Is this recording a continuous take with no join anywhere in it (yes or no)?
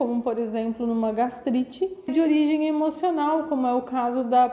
no